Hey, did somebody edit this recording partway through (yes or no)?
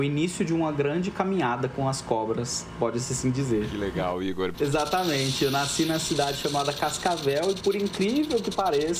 yes